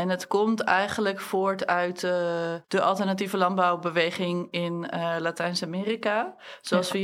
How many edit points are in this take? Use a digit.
1